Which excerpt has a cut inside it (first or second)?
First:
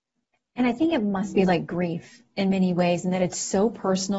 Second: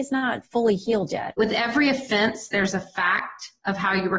second